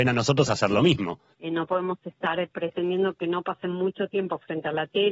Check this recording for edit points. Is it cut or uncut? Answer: cut